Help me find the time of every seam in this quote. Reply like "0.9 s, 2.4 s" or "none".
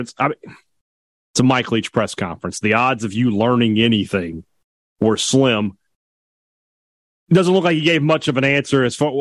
none